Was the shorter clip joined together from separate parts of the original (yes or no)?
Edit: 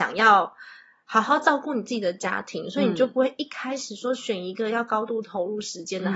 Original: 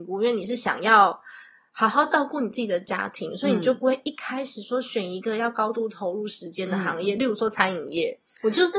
no